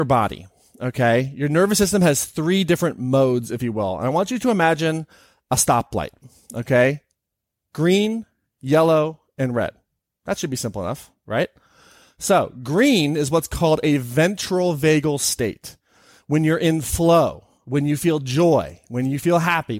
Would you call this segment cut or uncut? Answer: uncut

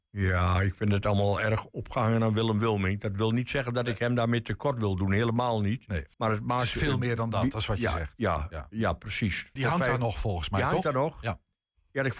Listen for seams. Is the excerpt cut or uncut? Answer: cut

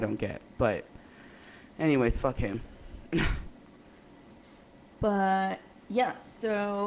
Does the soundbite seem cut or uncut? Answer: uncut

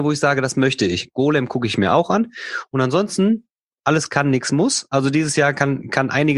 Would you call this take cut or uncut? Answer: uncut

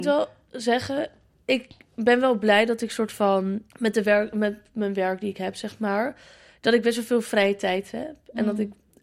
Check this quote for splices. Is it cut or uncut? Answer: cut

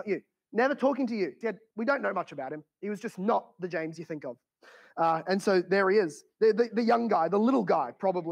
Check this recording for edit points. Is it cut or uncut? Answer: cut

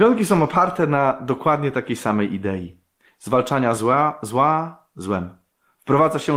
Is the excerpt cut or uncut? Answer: uncut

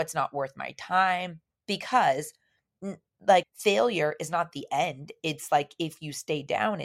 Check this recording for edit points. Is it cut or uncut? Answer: cut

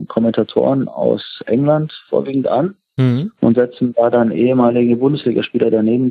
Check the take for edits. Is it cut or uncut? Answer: uncut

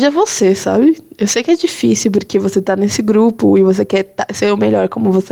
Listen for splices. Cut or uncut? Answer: uncut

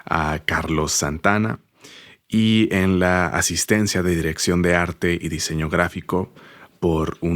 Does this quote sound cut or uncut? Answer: uncut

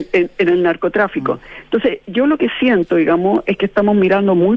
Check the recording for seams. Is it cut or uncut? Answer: uncut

